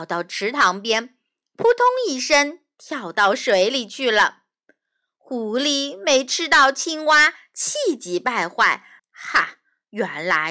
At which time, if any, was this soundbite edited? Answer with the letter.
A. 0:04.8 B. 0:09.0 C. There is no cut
B